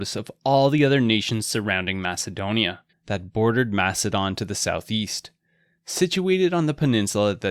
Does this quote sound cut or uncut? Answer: cut